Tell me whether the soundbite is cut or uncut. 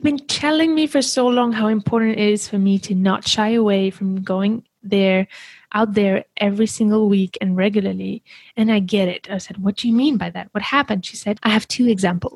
cut